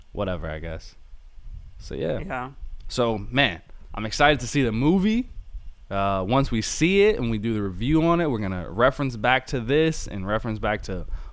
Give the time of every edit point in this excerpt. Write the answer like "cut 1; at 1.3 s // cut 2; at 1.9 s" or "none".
none